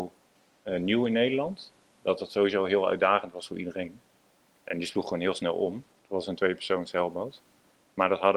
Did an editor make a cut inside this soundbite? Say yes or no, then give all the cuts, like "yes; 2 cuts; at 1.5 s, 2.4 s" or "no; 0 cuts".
yes; 1 cut; at 6.0 s